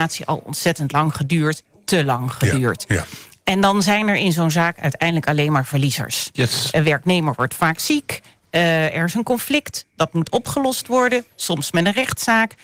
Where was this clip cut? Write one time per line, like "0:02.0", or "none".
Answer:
none